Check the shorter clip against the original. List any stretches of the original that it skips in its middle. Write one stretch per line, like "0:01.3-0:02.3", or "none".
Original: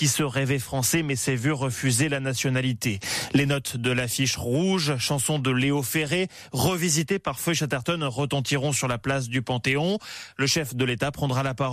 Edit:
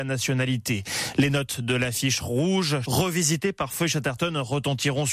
0:05.0-0:06.5